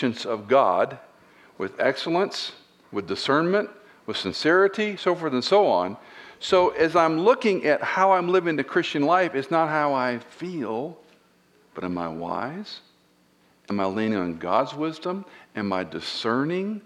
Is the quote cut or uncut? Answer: uncut